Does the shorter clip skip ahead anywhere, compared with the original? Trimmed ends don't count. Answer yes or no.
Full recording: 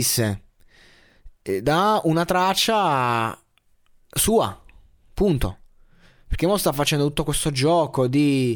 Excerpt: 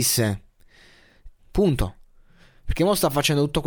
yes